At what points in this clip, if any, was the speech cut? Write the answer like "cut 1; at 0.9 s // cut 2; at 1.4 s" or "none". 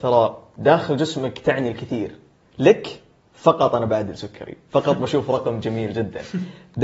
none